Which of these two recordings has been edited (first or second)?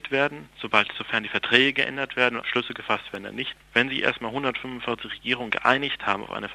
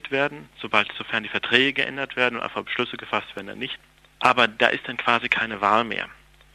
first